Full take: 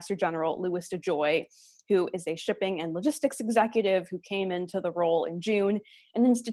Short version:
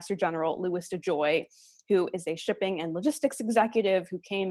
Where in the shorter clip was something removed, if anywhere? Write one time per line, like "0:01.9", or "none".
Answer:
none